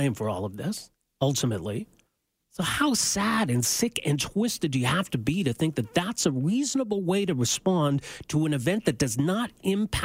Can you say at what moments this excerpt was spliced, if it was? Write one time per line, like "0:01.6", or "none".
0:02.4